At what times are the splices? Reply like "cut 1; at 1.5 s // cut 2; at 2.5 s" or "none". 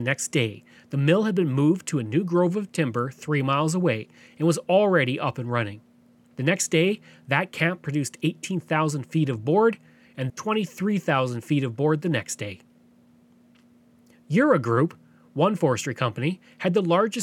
cut 1; at 10.3 s